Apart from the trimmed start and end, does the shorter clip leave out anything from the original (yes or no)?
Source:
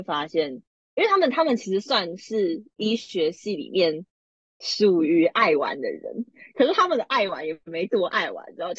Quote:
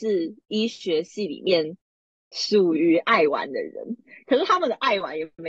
no